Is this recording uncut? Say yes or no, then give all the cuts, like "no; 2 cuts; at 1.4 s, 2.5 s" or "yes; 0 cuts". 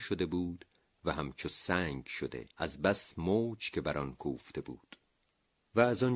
no; 1 cut; at 2.5 s